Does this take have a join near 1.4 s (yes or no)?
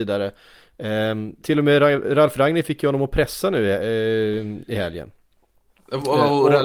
yes